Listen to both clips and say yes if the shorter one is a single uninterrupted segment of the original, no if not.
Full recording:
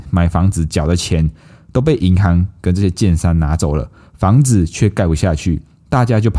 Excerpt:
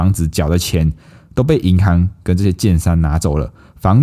yes